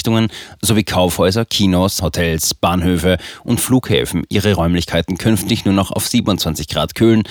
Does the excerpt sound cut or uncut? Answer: cut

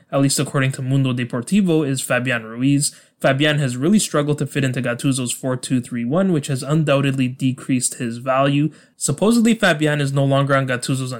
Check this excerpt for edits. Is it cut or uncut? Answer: uncut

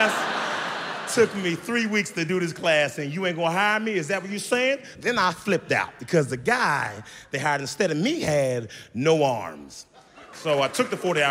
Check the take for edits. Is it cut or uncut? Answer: cut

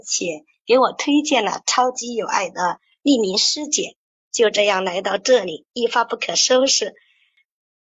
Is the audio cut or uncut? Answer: uncut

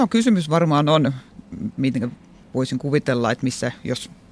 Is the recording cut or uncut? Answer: uncut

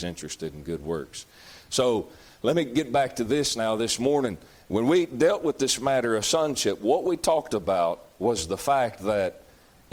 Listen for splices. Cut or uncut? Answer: uncut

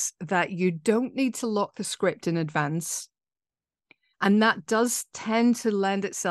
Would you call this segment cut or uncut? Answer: cut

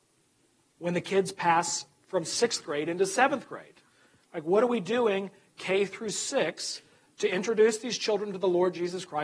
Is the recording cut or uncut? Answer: uncut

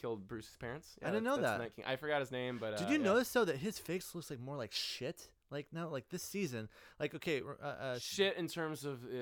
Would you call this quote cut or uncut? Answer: uncut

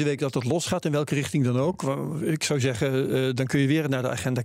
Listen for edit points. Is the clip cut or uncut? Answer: uncut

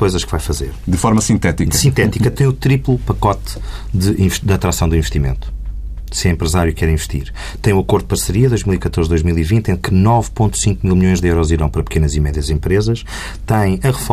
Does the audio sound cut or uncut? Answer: uncut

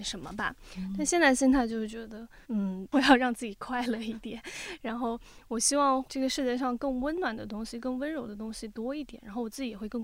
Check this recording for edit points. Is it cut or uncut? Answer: cut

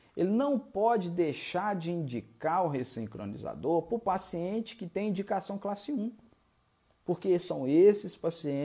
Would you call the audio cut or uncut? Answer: uncut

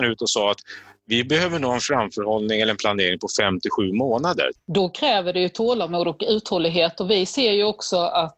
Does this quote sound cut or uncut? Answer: cut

